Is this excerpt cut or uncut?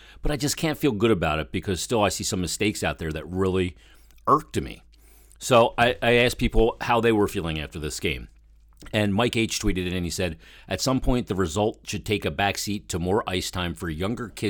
uncut